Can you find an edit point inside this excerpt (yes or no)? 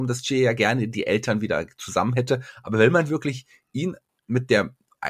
no